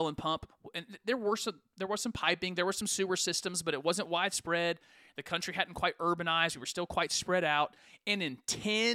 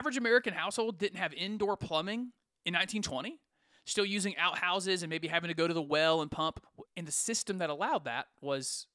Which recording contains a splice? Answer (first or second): second